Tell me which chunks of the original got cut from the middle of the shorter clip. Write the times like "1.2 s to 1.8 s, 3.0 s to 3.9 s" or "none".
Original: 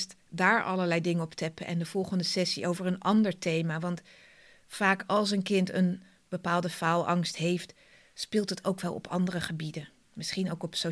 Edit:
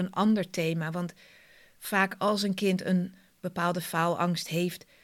none